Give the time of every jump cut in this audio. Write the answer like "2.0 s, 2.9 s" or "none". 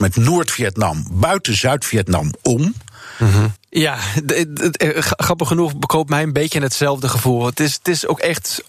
3.6 s